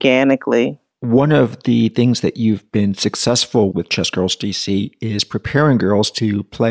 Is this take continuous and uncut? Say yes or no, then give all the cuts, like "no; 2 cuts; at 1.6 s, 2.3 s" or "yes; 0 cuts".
no; 1 cut; at 3.7 s